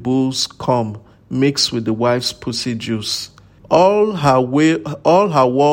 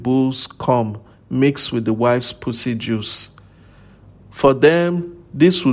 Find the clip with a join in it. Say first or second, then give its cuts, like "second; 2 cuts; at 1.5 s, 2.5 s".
first; 1 cut; at 3.6 s